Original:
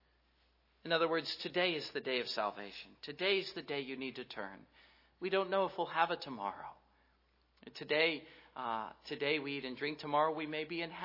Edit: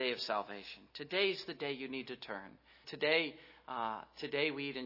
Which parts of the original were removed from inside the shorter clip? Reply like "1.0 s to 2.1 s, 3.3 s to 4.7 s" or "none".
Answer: 4.9 s to 7.7 s